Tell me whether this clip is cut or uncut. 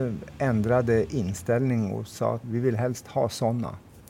cut